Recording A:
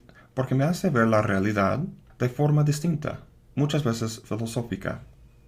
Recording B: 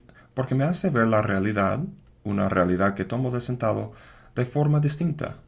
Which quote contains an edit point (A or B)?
A